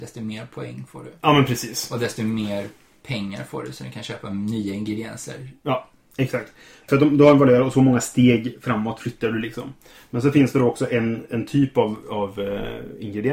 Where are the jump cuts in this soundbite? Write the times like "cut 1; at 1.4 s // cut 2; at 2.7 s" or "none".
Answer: none

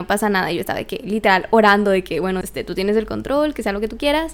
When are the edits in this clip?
cut 1; at 2.4 s

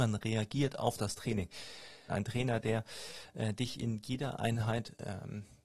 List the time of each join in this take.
cut 1; at 2.1 s

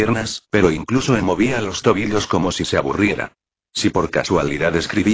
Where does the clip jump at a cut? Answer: cut 1; at 1.2 s

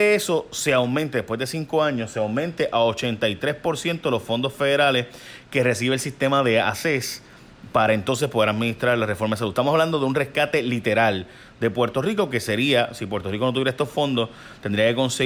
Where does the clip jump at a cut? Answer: none

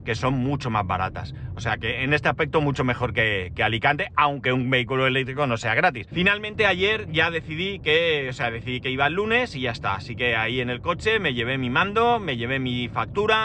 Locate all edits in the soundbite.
cut 1; at 6.1 s

